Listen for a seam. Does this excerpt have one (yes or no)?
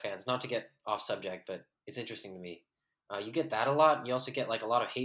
no